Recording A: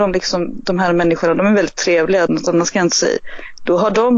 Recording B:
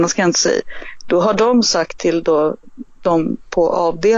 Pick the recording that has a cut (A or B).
A